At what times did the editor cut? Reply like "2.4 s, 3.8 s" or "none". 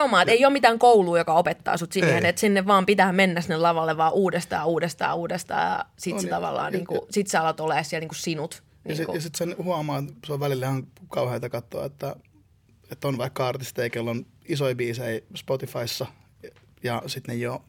none